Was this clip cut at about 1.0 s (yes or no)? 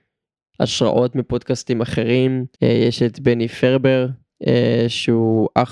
no